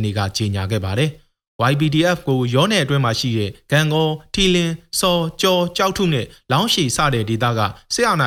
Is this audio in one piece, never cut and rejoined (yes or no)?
yes